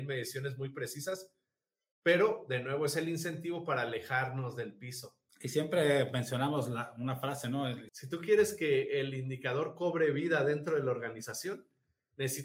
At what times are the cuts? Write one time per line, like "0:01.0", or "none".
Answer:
0:05.3
0:07.9